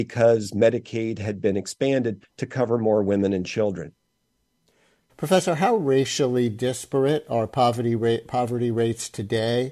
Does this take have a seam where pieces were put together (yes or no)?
yes